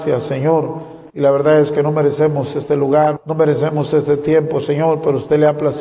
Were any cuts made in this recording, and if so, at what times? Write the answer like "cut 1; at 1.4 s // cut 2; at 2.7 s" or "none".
cut 1; at 1.1 s // cut 2; at 3.2 s